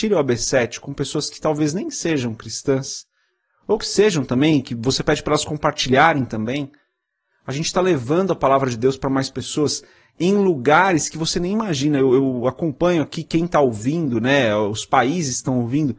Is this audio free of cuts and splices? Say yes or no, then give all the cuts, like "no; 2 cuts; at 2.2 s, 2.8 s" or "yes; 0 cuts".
yes; 0 cuts